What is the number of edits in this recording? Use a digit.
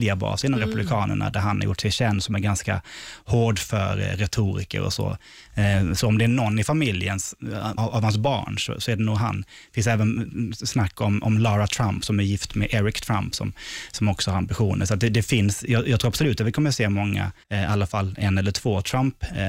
2